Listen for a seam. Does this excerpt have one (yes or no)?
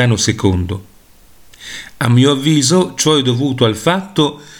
no